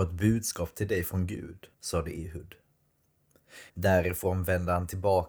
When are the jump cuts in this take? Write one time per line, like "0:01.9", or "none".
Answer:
0:01.7
0:03.7